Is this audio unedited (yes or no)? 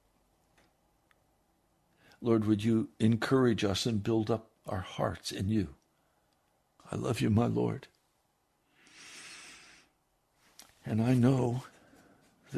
no